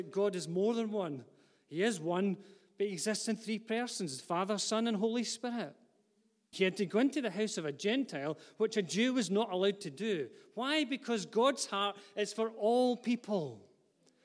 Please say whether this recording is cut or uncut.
cut